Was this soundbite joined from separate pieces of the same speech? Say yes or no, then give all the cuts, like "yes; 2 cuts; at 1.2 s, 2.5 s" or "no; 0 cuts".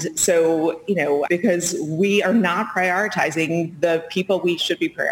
yes; 1 cut; at 1.3 s